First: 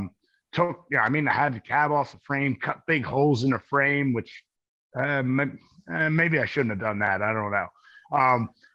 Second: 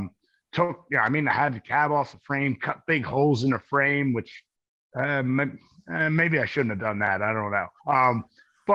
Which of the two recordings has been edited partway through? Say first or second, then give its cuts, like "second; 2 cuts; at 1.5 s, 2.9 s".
second; 1 cut; at 7.8 s